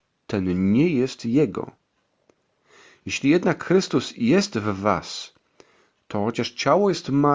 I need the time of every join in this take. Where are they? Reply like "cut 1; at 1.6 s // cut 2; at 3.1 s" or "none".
none